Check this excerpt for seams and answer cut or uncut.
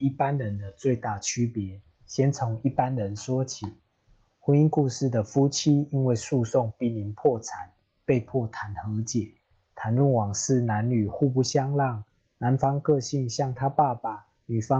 uncut